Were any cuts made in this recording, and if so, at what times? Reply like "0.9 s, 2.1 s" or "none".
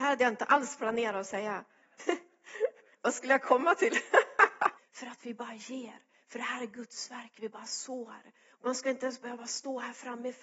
2.0 s, 4.8 s